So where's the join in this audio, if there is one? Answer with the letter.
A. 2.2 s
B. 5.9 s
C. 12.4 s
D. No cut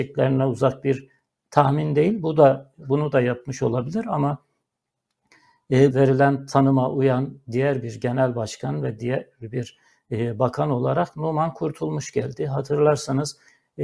B